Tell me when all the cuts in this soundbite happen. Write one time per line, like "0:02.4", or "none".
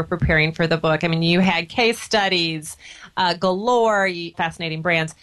0:04.3